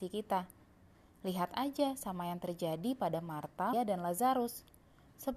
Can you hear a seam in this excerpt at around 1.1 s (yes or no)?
no